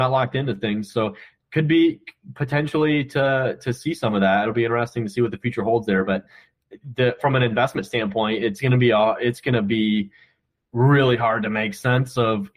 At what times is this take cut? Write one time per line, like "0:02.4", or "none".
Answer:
none